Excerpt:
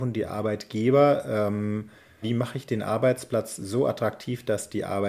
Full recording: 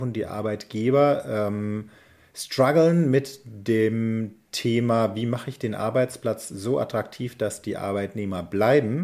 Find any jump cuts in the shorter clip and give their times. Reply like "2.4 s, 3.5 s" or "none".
2.2 s